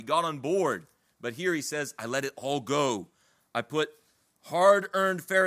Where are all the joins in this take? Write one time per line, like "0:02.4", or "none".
none